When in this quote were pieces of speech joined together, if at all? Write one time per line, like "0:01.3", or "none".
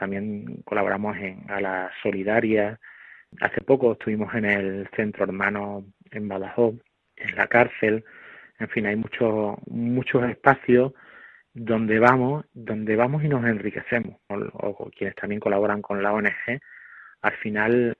0:14.3